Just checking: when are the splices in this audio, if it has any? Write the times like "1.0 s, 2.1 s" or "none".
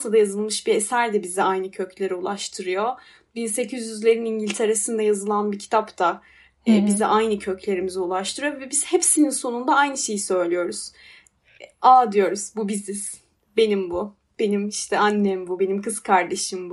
none

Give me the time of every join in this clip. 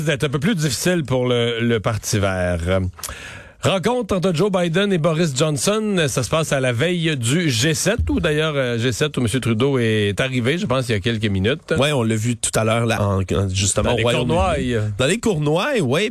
13.0 s

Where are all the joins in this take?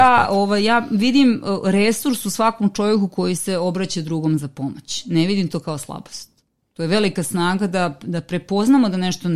none

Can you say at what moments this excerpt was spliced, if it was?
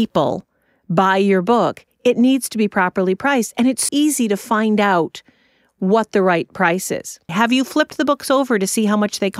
3.9 s, 7.3 s

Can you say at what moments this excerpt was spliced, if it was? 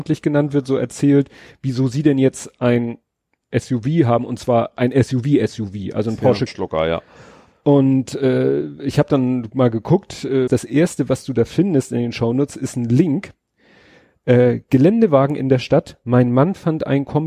6.5 s, 10.5 s

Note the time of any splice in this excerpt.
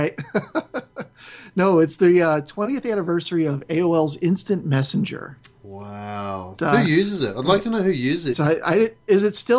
6.6 s, 8.3 s

